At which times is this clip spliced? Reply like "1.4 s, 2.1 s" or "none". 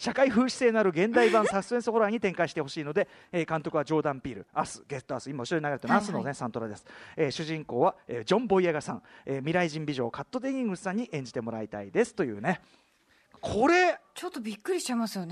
none